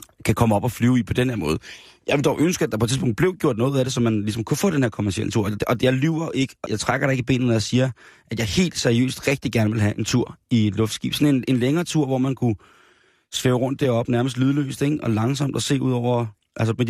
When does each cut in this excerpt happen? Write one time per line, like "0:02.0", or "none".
0:06.7